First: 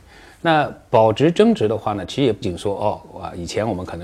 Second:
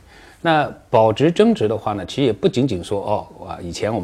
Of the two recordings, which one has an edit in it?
first; 1 cut; at 2.4 s

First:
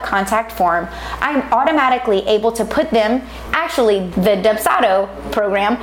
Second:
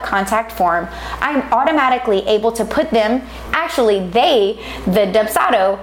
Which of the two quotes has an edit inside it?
first; 1 cut; at 4.1 s

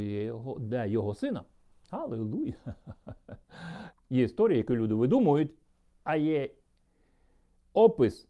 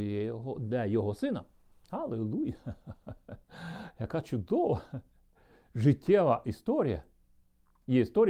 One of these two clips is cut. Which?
first; 1 cut; at 3.9 s

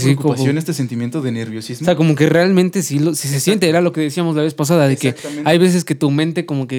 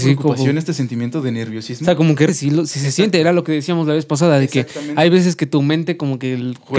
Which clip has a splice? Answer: second; 1 cut; at 2.3 s

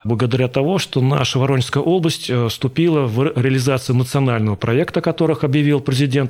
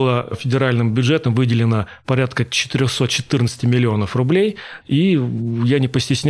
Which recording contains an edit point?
second; 1 cut; at 4.8 s

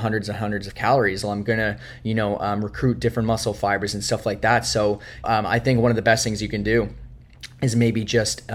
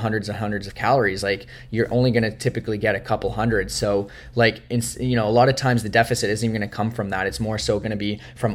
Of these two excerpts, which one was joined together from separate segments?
first; 2 cuts; at 1.2 s, 5.2 s

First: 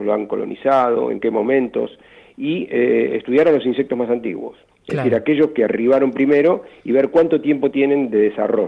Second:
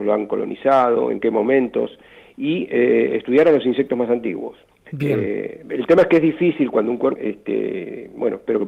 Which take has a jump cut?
second; 2 cuts; at 4.8 s, 7.2 s

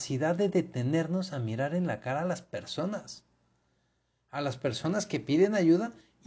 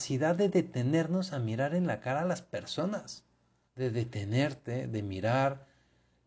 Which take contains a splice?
second; 1 cut; at 3.7 s

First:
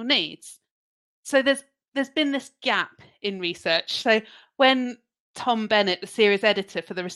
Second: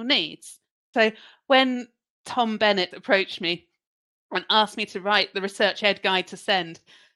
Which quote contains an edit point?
second; 2 cuts; at 0.9 s, 2.9 s

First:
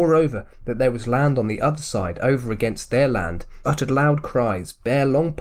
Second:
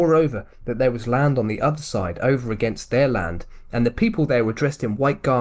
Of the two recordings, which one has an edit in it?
first; 1 cut; at 3.6 s

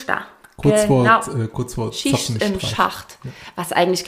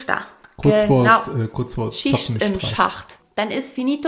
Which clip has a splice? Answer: second; 1 cut; at 3.2 s

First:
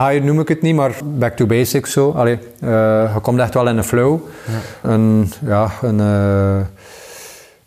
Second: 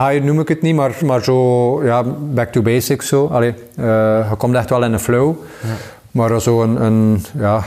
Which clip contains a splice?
first; 2 cuts; at 1.0 s, 4.8 s

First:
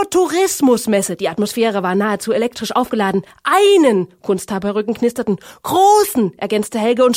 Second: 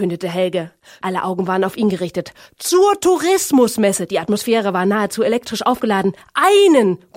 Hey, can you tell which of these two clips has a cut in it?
second; 1 cut; at 1.0 s

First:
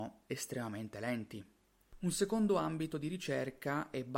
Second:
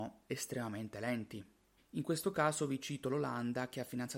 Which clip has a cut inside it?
second; 1 cut; at 1.8 s

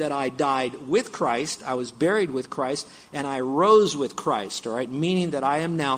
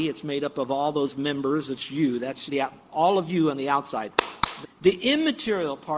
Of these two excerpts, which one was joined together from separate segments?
second; 2 cuts; at 2.5 s, 4.6 s

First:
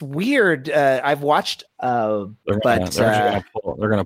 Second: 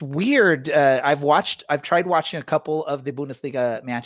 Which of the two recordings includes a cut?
first; 1 cut; at 1.7 s

